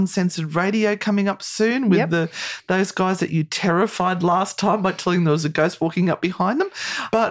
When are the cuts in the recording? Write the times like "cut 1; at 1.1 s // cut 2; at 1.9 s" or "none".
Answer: none